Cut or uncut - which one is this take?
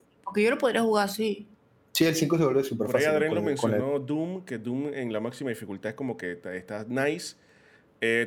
uncut